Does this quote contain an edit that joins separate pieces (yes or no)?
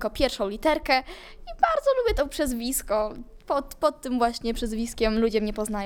no